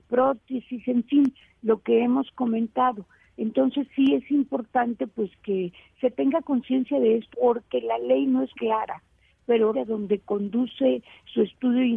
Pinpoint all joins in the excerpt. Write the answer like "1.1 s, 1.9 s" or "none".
7.3 s, 8.5 s, 9.7 s